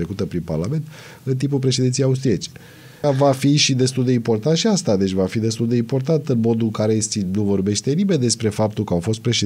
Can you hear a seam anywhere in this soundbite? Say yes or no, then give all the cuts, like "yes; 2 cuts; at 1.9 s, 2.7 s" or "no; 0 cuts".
yes; 1 cut; at 3.0 s